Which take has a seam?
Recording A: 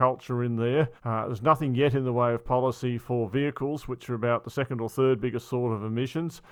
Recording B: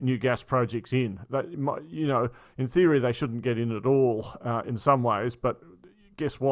A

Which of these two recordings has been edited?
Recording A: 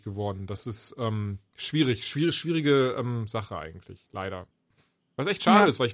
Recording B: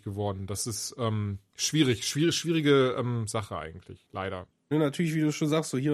B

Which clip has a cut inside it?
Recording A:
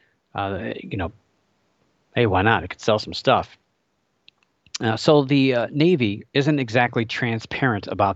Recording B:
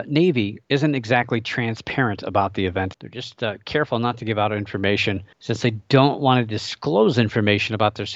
B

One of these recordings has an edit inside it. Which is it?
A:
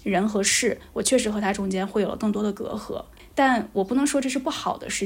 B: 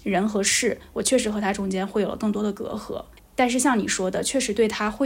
B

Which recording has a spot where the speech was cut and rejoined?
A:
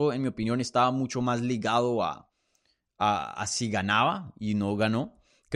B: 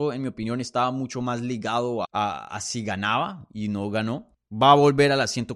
B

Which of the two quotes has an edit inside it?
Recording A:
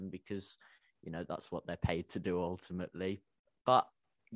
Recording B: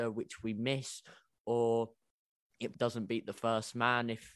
B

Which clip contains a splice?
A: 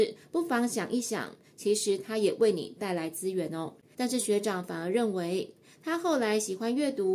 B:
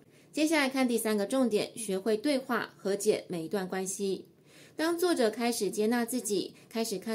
A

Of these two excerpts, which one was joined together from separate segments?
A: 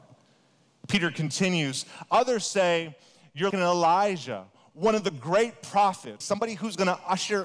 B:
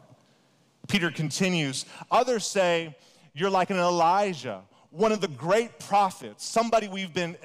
A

